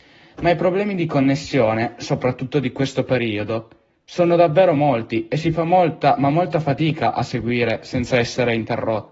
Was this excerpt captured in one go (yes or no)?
yes